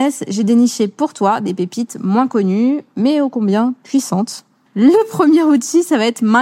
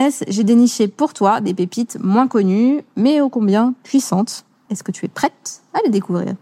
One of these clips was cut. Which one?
first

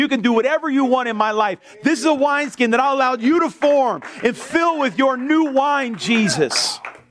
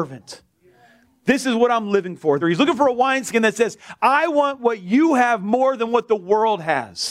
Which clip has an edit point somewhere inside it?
second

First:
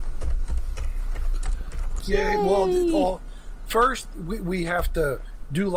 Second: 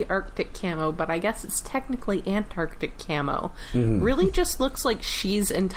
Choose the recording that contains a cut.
first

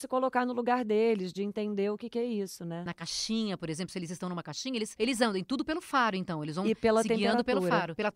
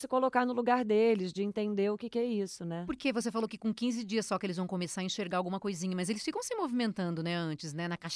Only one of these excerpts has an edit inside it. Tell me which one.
first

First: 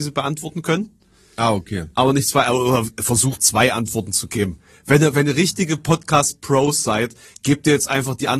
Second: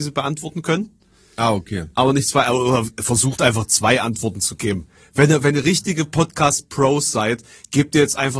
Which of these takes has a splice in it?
first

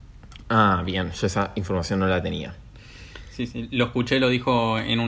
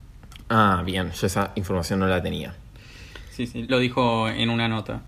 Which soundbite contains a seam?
second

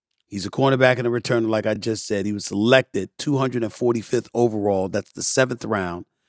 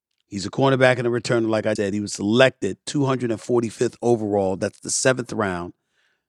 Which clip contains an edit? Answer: second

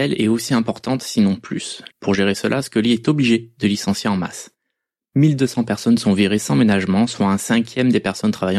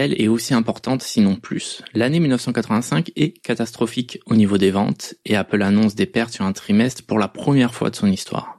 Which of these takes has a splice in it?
first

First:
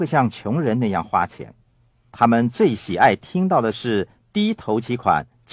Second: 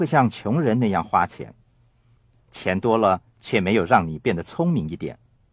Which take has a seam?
first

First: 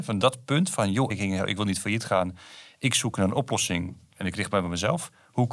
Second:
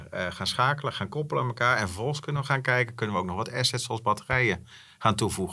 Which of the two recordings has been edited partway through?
first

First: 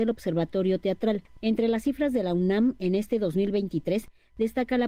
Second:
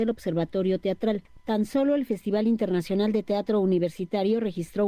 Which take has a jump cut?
first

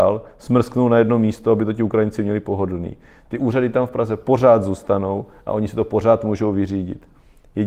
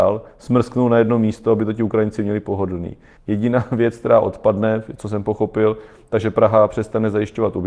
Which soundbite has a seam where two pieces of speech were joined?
second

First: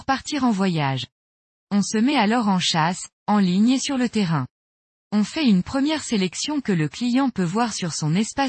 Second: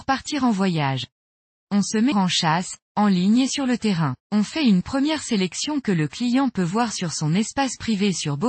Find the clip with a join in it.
second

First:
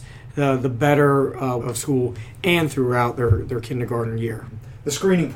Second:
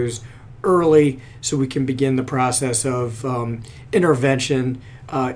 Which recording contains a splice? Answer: first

